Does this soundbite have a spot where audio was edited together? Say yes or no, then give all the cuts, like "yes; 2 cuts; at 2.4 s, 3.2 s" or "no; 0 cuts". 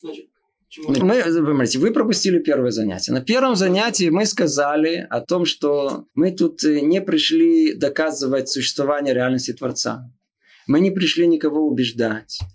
yes; 2 cuts; at 1.0 s, 6.1 s